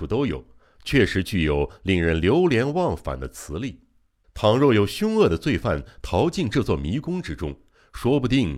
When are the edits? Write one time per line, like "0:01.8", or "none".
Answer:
0:04.2